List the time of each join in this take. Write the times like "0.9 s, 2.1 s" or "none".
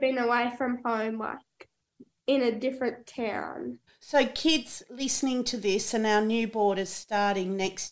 3.9 s